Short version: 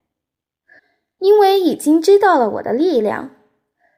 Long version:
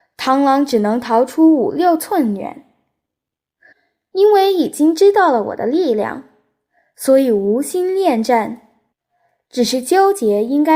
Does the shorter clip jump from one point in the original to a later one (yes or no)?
no